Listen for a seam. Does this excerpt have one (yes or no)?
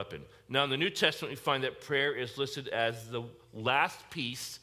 no